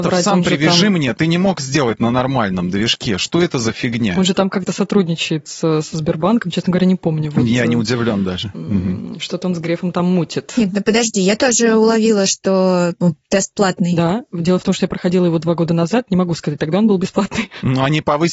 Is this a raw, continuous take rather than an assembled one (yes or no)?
yes